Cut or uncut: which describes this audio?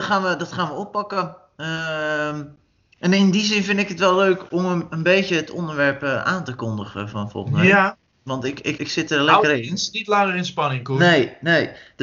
cut